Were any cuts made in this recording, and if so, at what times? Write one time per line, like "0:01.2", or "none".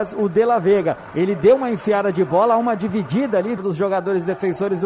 0:03.6